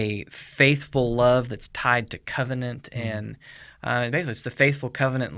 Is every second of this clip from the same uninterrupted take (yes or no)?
yes